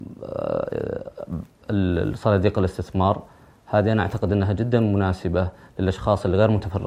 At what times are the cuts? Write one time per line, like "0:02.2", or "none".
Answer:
none